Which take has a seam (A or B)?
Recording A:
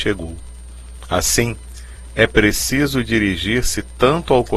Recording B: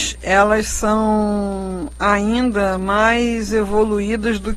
A